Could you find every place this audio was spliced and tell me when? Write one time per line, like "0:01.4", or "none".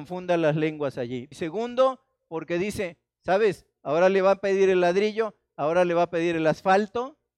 0:01.3